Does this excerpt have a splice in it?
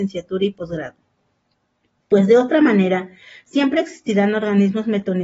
no; 0 cuts

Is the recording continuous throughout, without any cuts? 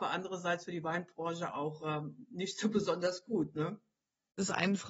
yes; 0 cuts

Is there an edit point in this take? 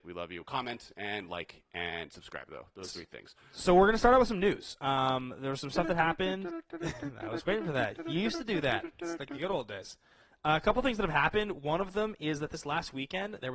no; 0 cuts

